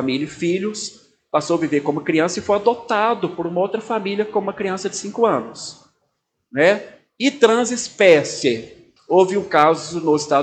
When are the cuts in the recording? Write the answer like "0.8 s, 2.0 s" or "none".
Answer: 9.0 s